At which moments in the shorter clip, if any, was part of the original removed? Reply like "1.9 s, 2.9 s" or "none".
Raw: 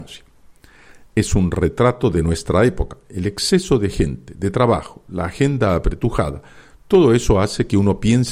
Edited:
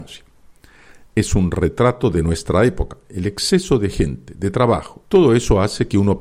5.0 s